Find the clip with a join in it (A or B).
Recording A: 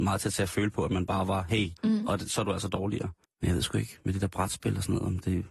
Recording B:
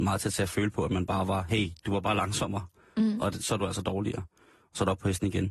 A